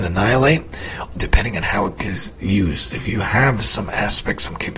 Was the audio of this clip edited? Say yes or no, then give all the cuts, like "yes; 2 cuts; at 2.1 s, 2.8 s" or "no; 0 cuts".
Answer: yes; 1 cut; at 1.2 s